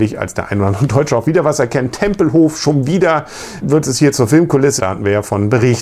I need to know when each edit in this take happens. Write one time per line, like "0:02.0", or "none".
0:03.6
0:04.8